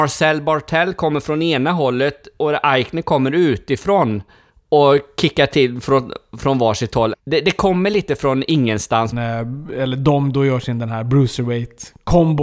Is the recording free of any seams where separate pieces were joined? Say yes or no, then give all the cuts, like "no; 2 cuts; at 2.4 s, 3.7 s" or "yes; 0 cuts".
no; 2 cuts; at 7.1 s, 9.1 s